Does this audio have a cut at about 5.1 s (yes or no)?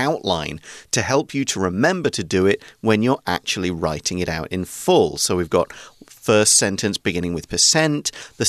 no